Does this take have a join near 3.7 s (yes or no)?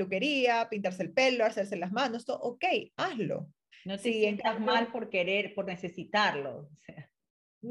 yes